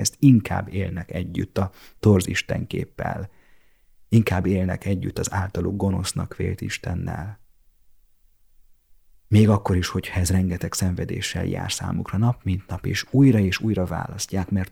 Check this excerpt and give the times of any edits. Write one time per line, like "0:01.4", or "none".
none